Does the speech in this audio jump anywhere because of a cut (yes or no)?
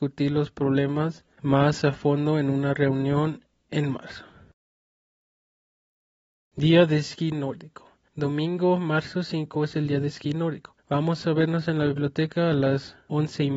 no